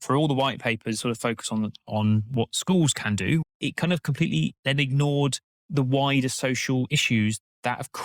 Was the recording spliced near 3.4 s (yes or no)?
yes